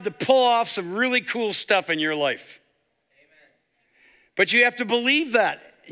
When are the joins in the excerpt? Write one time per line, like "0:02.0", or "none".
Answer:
none